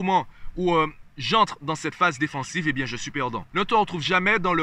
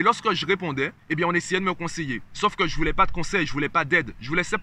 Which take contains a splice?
first; 1 cut; at 3.5 s

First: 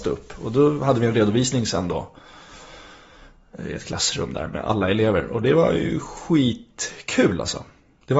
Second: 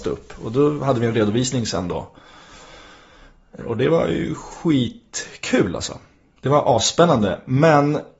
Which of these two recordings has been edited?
second; 1 cut; at 3.6 s

